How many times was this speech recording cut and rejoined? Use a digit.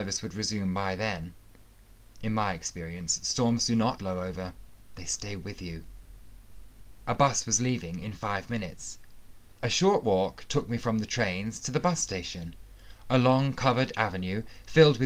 3